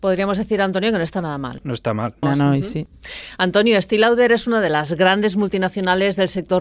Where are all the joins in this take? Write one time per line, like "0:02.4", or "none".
0:02.2